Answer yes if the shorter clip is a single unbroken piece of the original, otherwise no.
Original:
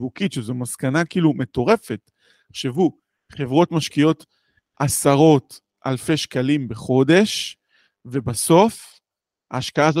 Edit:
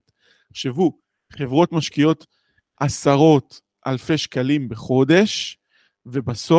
yes